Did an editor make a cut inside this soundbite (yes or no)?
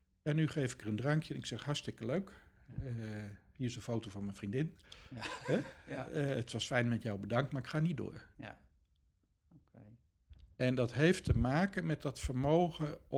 no